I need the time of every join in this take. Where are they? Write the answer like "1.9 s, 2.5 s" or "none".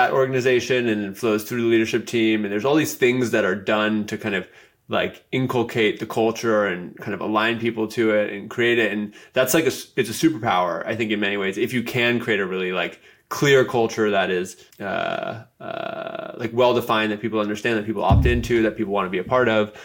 14.7 s